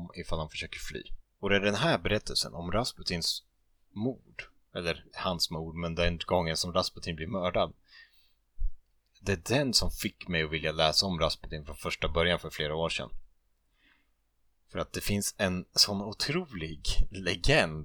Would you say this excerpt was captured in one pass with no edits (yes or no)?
yes